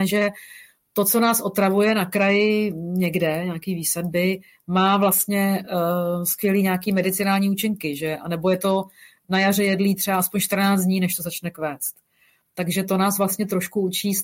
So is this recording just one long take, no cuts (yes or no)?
yes